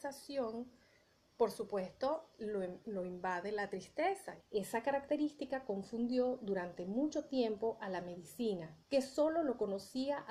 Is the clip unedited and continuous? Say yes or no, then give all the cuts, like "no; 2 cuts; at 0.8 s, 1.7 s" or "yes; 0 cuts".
no; 2 cuts; at 4.4 s, 8.8 s